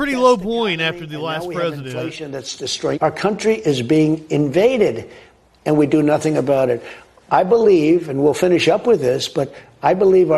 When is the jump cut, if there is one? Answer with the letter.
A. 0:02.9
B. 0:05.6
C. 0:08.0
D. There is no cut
A